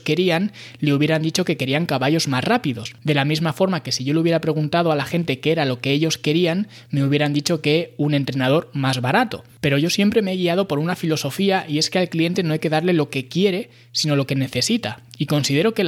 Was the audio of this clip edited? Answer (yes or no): no